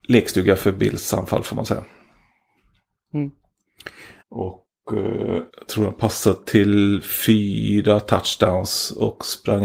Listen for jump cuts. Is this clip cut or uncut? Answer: cut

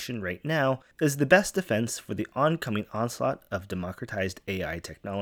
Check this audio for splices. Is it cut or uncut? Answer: cut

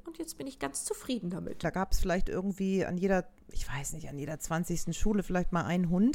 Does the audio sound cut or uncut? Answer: cut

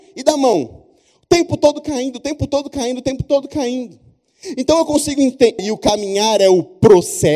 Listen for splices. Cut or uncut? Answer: cut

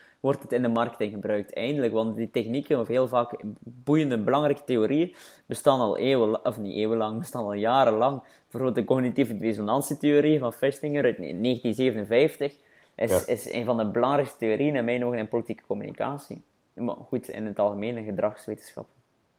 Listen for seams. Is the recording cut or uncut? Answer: uncut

